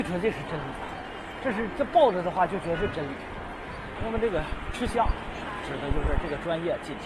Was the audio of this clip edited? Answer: yes; 1 cut; at 4.0 s

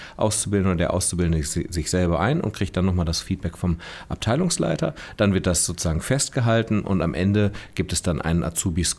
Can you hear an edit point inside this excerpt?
no; 0 cuts

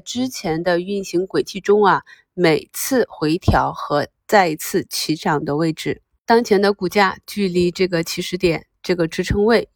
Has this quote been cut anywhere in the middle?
no; 0 cuts

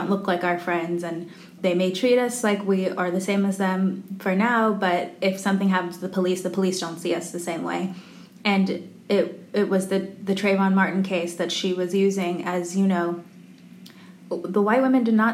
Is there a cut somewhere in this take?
yes; 1 cut; at 1.6 s

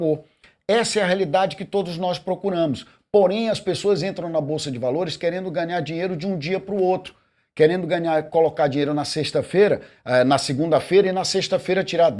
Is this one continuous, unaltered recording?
yes; 0 cuts

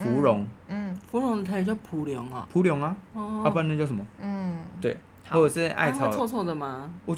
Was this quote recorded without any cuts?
no; 1 cut; at 4.2 s

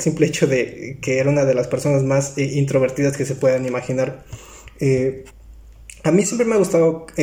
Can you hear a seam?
no; 0 cuts

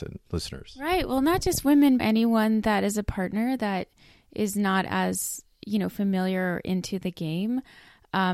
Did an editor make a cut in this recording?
yes; 1 cut; at 2.0 s

